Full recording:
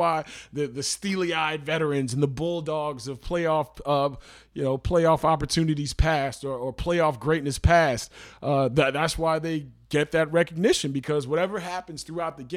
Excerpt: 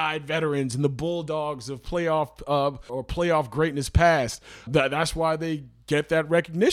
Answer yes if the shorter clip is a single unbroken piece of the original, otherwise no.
no